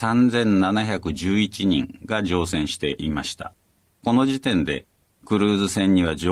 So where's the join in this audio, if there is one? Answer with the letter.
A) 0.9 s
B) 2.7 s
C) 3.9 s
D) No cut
C